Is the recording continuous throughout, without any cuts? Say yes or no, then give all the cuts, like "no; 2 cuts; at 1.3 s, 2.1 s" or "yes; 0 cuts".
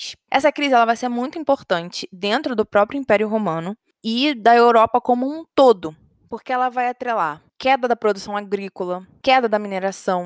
yes; 0 cuts